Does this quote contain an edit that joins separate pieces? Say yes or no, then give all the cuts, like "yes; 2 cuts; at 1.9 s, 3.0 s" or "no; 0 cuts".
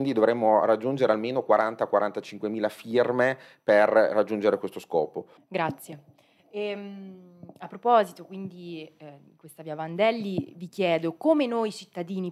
yes; 1 cut; at 5.4 s